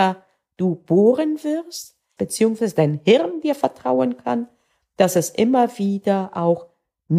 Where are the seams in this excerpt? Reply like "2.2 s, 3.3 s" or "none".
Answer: 2.2 s